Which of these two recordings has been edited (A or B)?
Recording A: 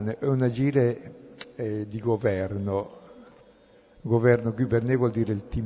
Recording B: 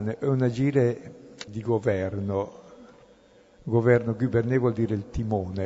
B